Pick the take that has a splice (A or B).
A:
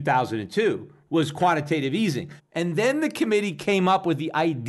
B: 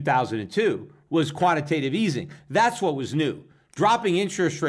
A